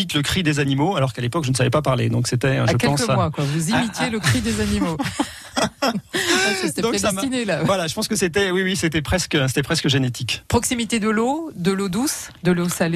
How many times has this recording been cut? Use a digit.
0